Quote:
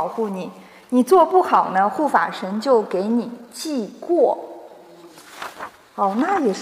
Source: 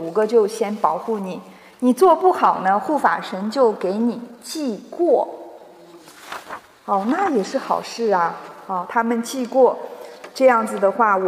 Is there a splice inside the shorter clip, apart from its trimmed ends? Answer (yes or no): no